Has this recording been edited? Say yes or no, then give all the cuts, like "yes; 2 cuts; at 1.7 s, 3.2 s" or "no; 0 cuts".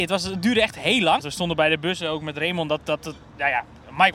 yes; 1 cut; at 1.2 s